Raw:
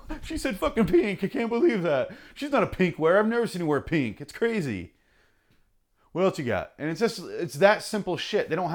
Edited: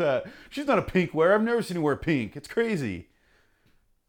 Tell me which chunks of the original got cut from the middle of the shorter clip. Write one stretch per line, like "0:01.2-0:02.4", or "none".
none

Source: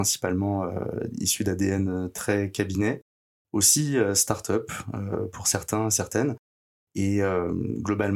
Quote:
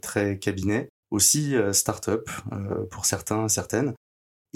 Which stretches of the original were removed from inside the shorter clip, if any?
0:03.1-0:03.4

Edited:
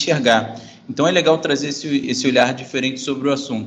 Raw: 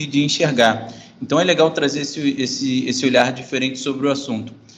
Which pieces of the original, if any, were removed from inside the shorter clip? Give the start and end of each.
0:02.4-0:02.8

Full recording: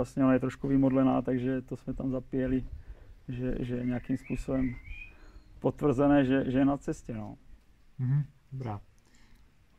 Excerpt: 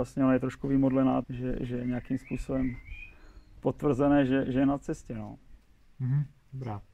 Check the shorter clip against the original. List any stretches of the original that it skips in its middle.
0:01.2-0:03.2

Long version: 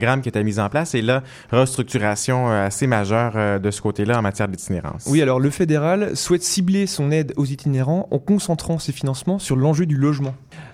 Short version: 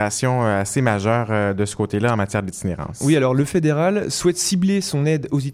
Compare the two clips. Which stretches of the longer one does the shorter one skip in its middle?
none

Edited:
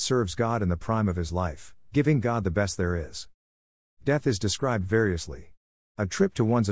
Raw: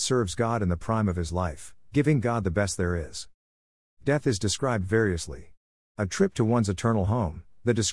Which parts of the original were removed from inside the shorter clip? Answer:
none

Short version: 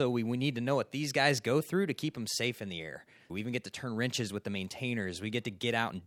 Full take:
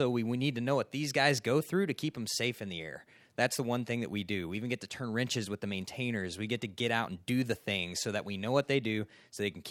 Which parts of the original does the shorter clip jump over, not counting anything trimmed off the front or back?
0:03.3-0:04.5

